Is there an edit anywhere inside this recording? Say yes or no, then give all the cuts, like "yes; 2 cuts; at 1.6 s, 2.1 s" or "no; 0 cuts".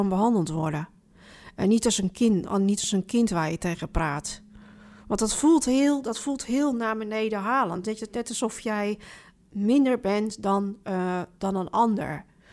no; 0 cuts